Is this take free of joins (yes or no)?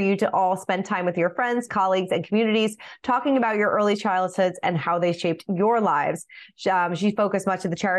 no